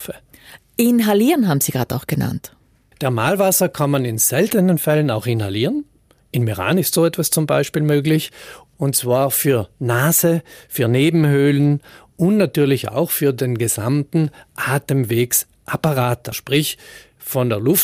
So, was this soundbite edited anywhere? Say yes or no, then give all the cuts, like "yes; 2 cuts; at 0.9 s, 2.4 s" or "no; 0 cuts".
yes; 1 cut; at 16.3 s